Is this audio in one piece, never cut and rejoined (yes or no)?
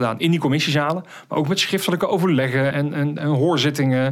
no